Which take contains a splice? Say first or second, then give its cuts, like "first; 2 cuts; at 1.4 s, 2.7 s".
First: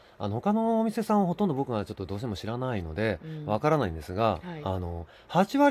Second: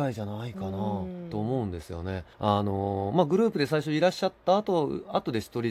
second; 1 cut; at 2.3 s